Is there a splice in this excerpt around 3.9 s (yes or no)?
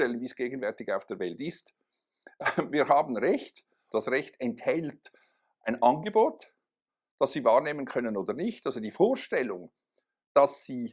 yes